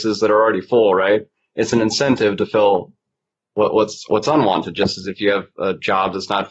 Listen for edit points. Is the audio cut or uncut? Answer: uncut